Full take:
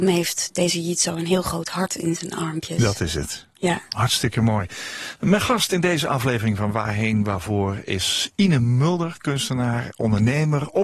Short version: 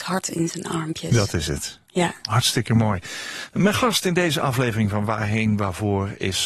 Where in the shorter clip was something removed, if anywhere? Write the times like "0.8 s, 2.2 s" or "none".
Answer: none